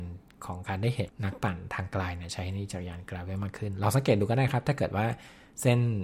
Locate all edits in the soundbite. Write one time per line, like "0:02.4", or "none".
0:01.1